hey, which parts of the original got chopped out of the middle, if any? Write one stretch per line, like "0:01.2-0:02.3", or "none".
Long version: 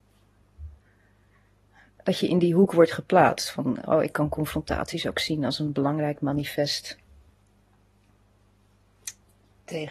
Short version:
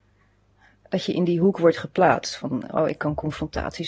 none